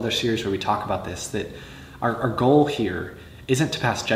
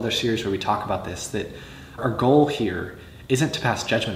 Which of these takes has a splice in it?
second; 1 cut; at 2.0 s

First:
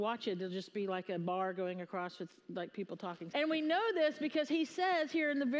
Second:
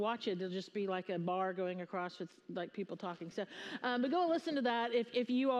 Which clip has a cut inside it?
first; 1 cut; at 3.3 s

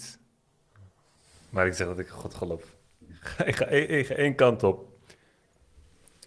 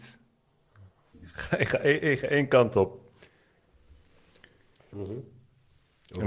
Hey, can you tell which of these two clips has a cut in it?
second; 2 cuts; at 1.1 s, 4.9 s

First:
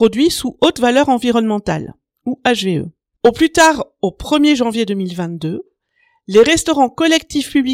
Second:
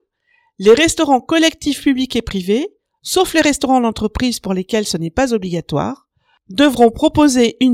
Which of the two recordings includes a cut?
first; 1 cut; at 3.2 s

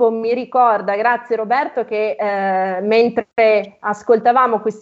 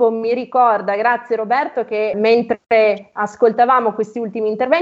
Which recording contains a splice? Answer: second; 1 cut; at 2.1 s

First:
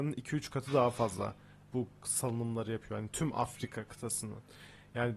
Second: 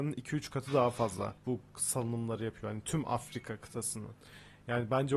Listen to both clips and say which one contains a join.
second; 1 cut; at 1.4 s

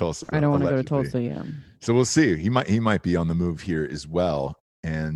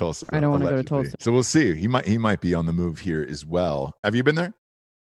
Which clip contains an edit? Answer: second; 2 cuts; at 1.1 s, 4.0 s

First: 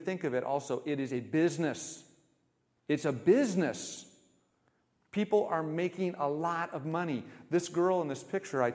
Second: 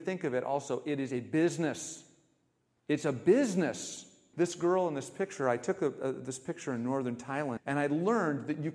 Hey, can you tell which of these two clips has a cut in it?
second; 2 cuts; at 4.3 s, 7.6 s

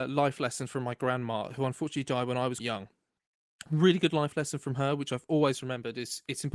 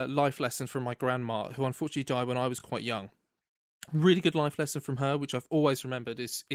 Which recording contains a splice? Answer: first; 1 cut; at 2.6 s

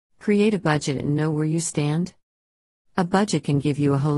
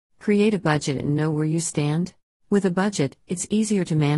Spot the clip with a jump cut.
second; 1 cut; at 2.3 s

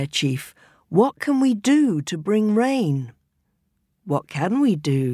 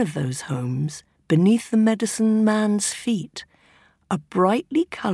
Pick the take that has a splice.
second; 1 cut; at 1.1 s

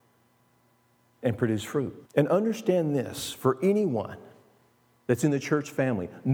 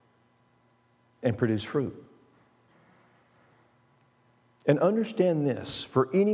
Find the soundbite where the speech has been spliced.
first; 1 cut; at 2.0 s

